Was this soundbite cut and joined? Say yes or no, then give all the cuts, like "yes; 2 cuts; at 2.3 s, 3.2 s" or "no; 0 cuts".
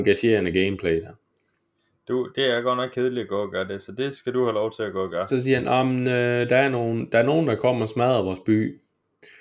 yes; 1 cut; at 5.3 s